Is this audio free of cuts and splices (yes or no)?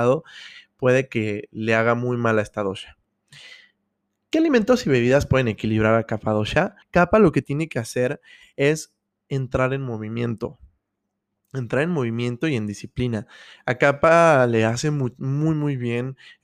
no